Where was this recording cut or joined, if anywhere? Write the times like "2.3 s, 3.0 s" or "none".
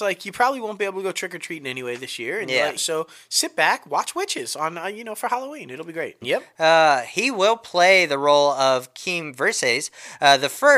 2.8 s, 6.2 s